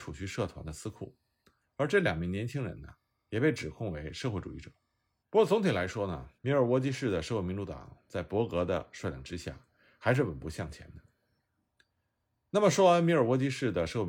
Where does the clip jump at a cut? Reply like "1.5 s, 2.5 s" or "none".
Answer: 5.2 s, 6.4 s